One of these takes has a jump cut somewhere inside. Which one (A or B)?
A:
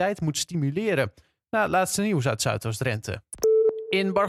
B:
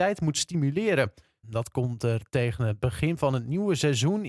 B